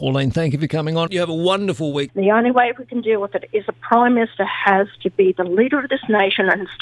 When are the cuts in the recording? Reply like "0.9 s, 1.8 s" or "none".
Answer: 1.1 s, 2.1 s